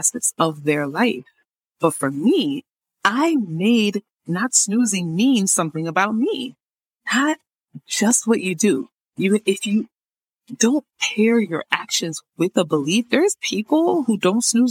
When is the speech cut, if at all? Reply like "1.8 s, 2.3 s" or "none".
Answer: 7.0 s